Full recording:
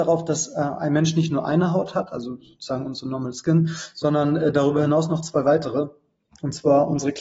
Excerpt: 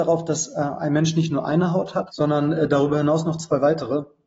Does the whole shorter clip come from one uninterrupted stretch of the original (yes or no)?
no